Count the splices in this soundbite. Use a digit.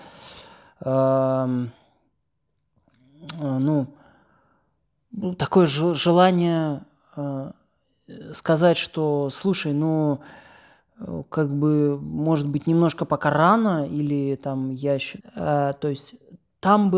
1